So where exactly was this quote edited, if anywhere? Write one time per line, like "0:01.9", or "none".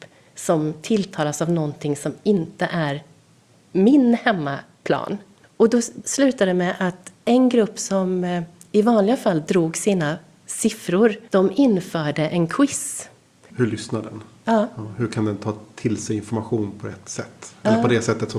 0:11.3
0:13.5

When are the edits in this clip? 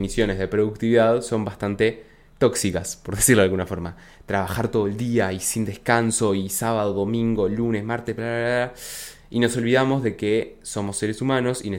none

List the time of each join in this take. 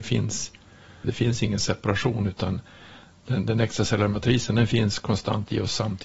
0:01.0

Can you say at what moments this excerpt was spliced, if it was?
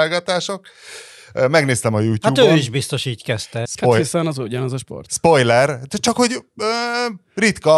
0:03.7

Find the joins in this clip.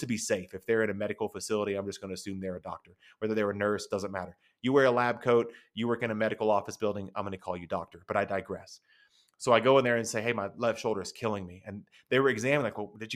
0:03.9

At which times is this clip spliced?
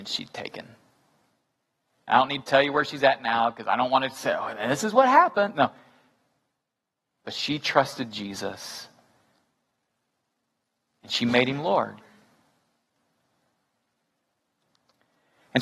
none

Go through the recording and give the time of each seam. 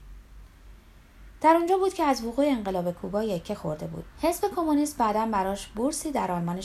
0:04.1

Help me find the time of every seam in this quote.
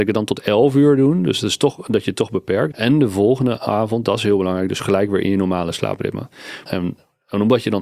0:02.7
0:06.7

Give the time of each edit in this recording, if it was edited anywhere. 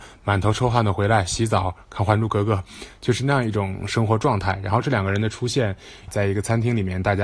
0:06.1

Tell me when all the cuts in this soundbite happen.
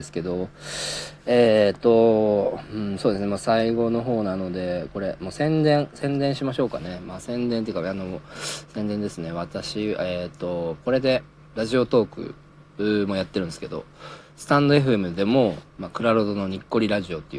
0:11.4
0:15.7

